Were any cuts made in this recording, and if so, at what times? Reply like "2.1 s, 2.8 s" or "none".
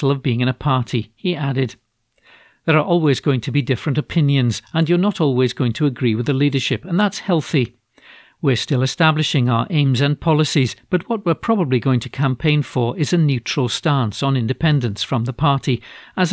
none